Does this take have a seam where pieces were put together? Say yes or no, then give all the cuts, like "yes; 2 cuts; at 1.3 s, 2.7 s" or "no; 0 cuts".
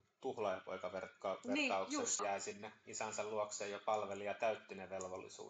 yes; 1 cut; at 2.2 s